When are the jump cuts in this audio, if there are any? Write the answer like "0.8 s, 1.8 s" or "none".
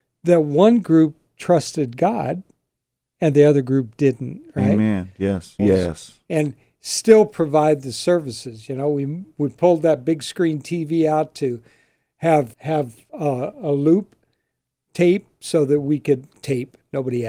5.6 s, 12.5 s